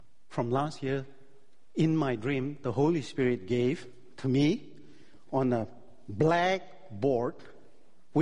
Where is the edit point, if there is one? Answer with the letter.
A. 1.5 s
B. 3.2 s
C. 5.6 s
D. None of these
D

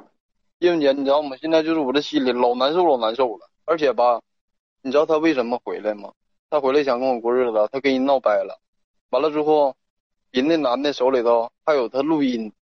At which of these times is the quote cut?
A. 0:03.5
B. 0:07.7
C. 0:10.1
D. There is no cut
A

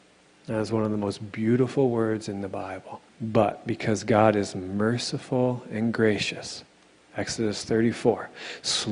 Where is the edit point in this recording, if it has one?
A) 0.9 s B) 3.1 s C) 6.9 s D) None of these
B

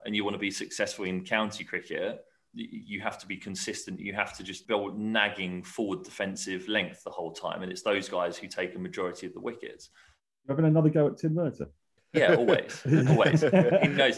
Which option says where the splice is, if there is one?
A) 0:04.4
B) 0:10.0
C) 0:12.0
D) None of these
D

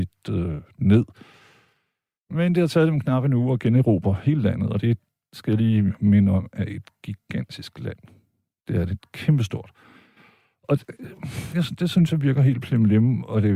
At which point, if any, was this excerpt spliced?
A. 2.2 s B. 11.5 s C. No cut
B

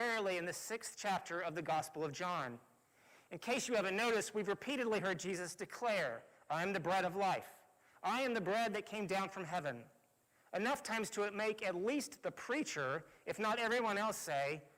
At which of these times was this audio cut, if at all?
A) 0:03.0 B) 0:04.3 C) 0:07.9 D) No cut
C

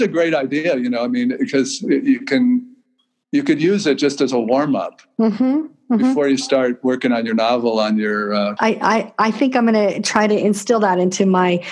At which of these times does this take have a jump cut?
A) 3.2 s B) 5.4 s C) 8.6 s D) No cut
C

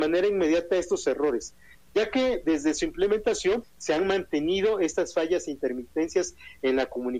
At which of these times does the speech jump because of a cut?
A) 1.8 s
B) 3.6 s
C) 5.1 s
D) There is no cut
B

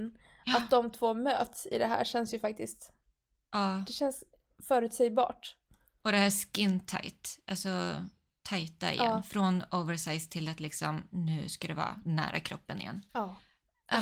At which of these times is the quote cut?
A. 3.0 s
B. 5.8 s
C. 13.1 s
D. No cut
C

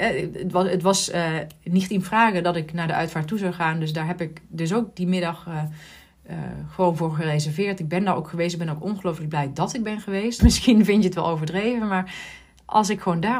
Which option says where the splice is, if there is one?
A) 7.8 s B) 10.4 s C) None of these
B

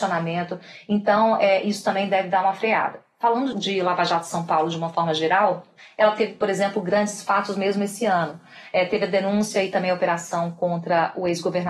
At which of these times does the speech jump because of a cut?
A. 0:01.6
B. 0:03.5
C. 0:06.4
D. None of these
B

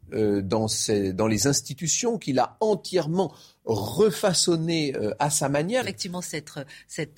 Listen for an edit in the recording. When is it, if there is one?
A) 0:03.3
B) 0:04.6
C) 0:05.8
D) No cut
C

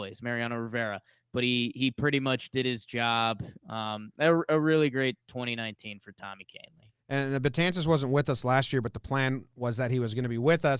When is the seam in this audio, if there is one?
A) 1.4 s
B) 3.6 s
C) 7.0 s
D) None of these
C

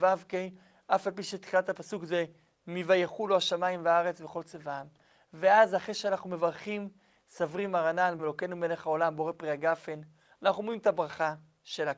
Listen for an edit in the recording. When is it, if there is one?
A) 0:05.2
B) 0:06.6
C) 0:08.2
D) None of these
C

